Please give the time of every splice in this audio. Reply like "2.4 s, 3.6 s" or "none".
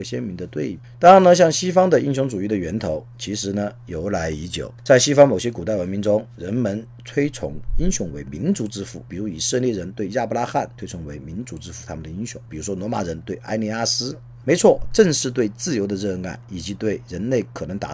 12.5 s, 14.4 s